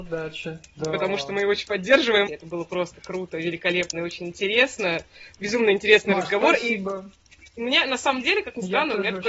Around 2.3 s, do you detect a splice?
yes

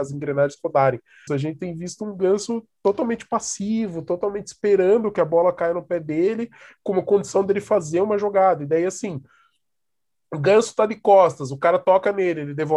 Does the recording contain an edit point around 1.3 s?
yes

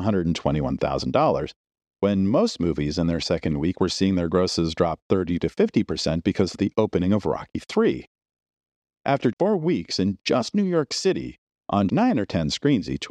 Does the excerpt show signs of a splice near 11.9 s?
yes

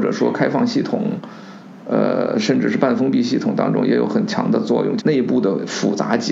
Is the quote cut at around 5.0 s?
yes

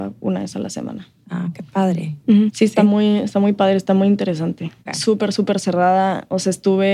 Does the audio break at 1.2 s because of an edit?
no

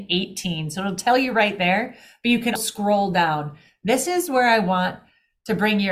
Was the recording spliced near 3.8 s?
no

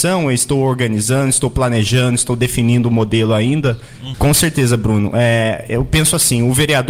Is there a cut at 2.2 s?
no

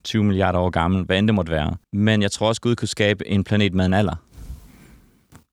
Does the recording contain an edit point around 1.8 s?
yes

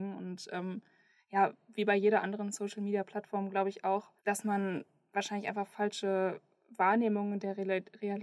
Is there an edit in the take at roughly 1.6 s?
no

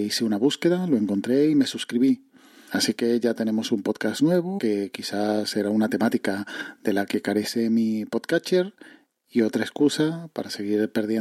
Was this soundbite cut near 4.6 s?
yes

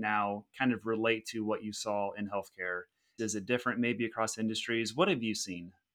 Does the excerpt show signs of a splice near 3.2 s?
yes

